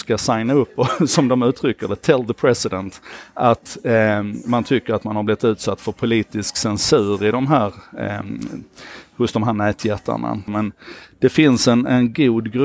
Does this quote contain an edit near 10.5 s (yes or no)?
yes